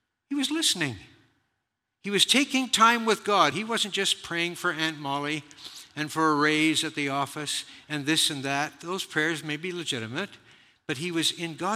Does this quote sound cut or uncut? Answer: uncut